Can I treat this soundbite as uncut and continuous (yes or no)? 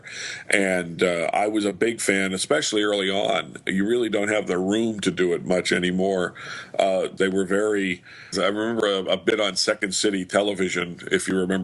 no